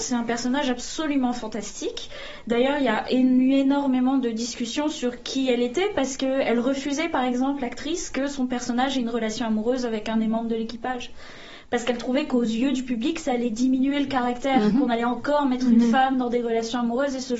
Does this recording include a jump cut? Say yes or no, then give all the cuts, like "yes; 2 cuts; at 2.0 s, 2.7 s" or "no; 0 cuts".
no; 0 cuts